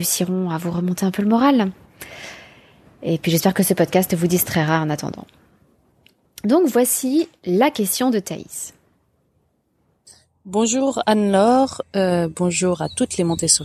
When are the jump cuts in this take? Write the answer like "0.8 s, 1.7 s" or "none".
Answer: none